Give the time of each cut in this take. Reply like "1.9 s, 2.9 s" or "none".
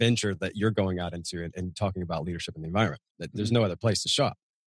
3.1 s